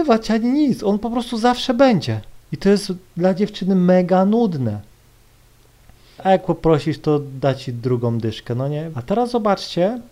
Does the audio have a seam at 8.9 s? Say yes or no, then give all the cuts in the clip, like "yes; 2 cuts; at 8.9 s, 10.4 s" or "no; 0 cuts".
yes; 3 cuts; at 2.4 s, 6.2 s, 8.9 s